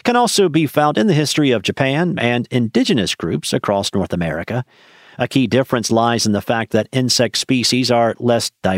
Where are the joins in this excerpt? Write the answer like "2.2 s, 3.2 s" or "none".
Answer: 2.2 s

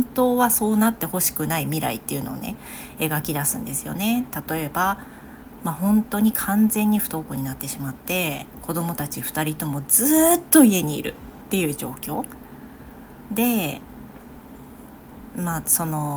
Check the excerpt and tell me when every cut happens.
none

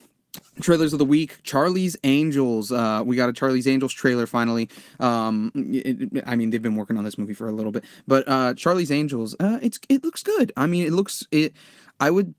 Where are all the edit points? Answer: none

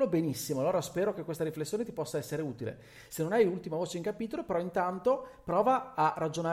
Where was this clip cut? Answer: none

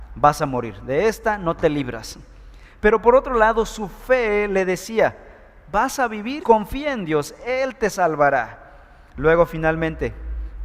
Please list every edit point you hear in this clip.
6.4 s, 9.1 s

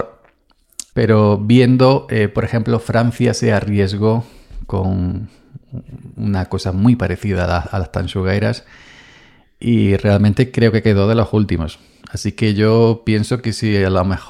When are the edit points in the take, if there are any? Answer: 0.9 s

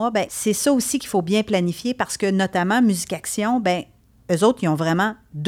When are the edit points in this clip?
none

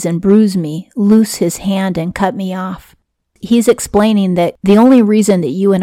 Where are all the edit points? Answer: none

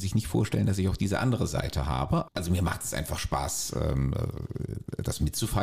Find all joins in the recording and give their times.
2.3 s

